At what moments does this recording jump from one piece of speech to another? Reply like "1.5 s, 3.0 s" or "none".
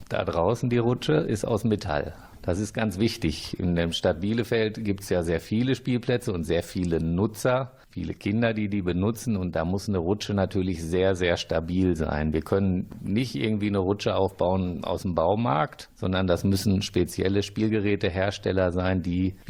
5.3 s